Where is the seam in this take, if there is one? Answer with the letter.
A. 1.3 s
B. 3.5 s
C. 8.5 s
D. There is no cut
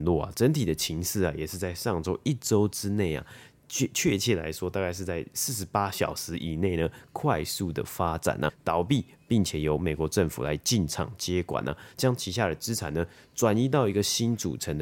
C